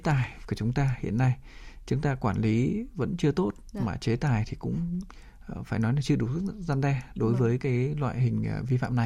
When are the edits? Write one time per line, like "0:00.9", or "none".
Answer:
none